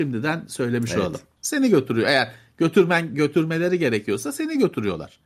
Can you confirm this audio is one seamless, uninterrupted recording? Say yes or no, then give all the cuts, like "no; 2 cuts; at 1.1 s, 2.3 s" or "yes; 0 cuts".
no; 1 cut; at 1.4 s